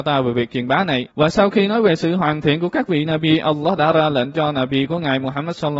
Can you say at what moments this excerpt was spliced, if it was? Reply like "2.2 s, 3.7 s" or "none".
1.1 s